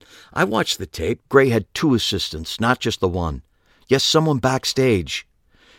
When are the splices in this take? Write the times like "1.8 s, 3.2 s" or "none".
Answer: 1.2 s